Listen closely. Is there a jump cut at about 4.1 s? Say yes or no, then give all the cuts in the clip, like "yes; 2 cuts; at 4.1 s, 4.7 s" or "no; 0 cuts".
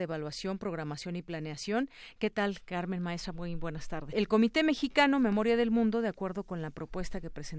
yes; 1 cut; at 4.1 s